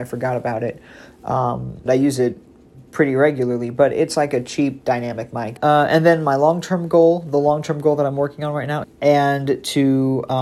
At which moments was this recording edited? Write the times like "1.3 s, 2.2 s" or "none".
1.9 s, 5.6 s, 8.8 s

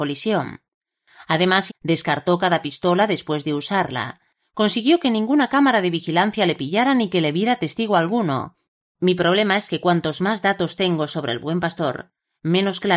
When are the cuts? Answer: 1.7 s, 8.8 s

